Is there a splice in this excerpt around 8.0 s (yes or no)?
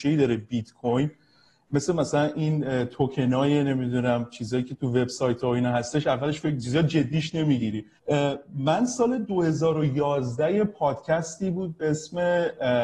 yes